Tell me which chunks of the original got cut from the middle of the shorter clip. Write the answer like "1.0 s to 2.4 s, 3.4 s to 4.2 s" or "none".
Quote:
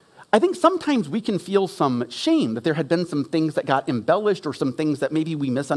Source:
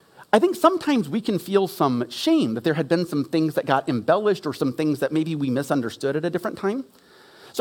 none